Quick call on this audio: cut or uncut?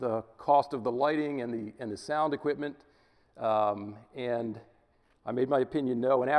uncut